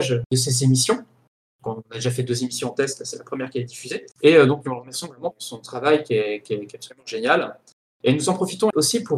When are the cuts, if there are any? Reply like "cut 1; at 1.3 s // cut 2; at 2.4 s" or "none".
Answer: none